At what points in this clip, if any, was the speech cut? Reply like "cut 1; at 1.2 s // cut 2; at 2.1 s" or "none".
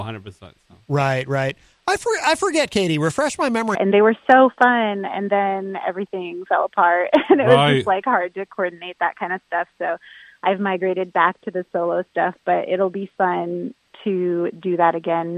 cut 1; at 3.7 s